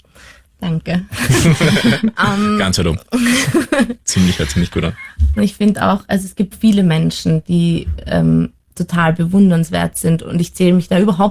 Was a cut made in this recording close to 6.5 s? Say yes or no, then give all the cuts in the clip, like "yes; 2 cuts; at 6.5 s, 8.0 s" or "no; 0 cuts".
yes; 2 cuts; at 5.4 s, 6.5 s